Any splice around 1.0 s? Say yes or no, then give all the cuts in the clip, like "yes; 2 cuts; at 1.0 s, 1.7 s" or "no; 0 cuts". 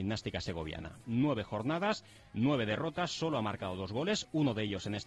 yes; 1 cut; at 1.0 s